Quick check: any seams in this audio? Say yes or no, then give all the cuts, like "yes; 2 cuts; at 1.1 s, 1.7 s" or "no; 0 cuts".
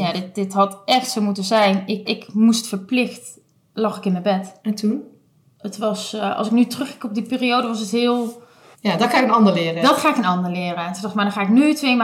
yes; 3 cuts; at 2.1 s, 5.5 s, 8.7 s